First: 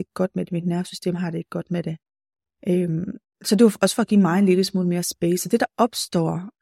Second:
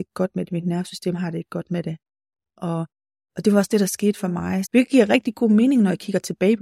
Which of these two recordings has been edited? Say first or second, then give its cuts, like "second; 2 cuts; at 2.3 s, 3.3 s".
second; 2 cuts; at 2.6 s, 4.6 s